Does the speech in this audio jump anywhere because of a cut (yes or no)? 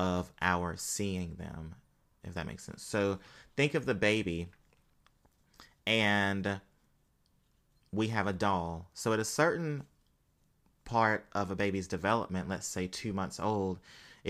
no